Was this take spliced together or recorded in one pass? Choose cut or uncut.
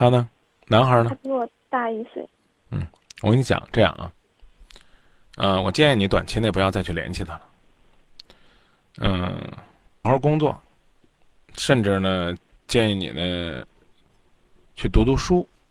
cut